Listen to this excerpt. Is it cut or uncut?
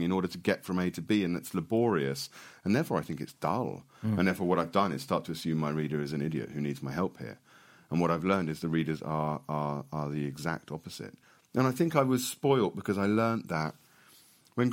uncut